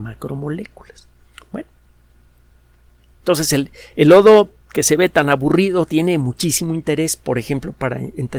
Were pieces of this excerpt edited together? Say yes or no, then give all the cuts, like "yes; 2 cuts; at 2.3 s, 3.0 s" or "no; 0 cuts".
no; 0 cuts